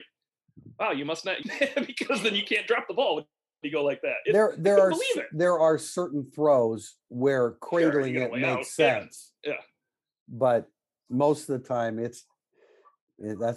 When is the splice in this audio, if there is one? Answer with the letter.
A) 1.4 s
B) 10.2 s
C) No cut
A